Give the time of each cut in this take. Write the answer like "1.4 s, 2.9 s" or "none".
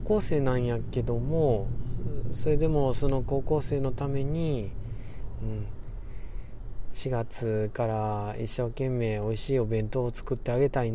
none